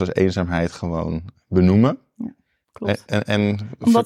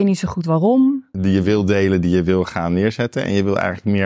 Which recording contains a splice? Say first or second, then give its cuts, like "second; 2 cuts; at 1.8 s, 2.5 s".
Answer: second; 1 cut; at 1.1 s